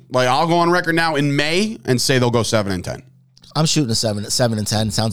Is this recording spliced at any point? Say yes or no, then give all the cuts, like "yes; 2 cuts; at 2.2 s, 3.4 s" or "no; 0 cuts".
no; 0 cuts